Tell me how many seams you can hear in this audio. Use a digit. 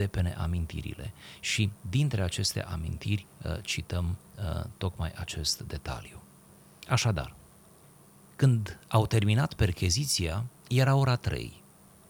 1